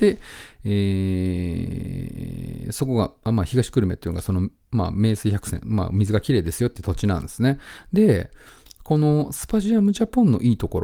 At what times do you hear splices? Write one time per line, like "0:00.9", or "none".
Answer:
none